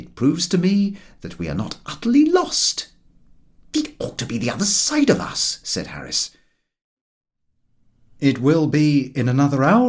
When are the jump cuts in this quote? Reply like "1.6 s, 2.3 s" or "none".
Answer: none